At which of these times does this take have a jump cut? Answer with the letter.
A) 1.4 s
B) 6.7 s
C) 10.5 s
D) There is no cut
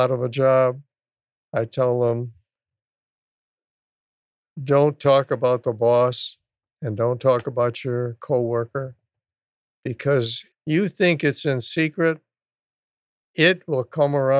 C